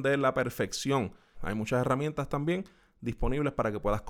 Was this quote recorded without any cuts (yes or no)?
no